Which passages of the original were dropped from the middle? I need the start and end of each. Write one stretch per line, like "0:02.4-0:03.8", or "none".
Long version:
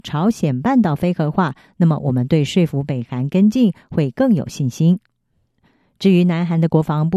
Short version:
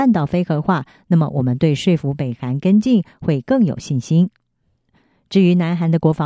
none